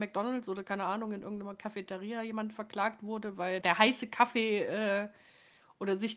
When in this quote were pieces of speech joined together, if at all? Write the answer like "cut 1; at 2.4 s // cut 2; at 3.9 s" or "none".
cut 1; at 3.6 s